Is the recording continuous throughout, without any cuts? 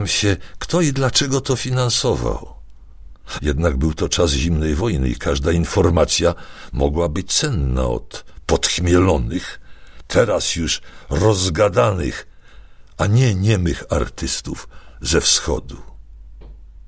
no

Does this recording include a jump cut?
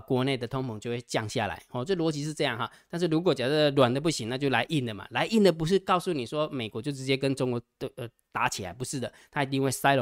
no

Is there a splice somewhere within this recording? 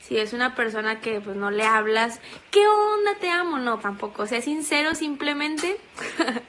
yes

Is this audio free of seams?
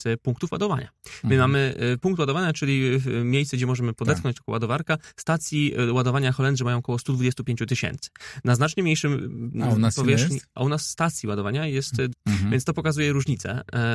no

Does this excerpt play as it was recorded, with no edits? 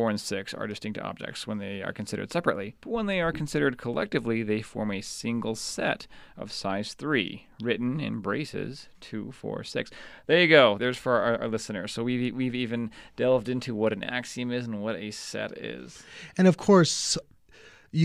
yes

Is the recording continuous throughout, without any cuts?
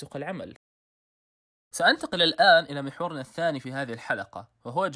yes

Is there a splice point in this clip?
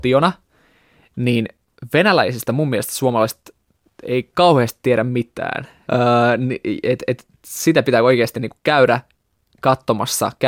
yes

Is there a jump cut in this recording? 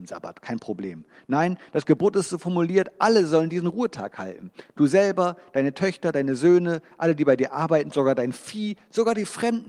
no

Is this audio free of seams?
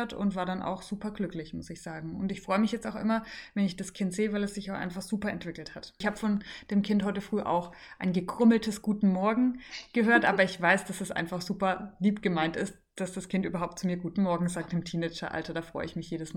yes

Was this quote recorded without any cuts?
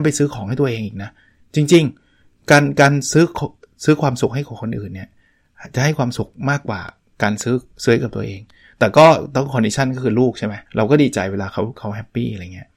no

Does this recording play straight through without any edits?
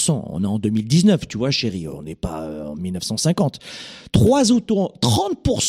yes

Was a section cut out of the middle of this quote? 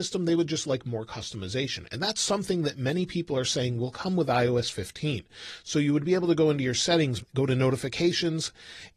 yes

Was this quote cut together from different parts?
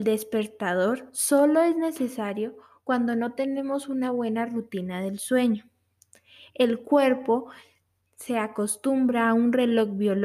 no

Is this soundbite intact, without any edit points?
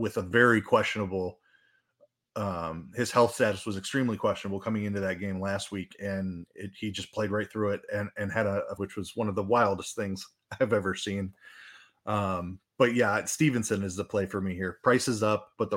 no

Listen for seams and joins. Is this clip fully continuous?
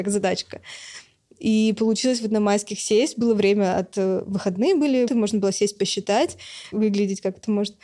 no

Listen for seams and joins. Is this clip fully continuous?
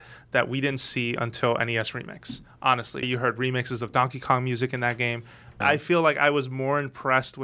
no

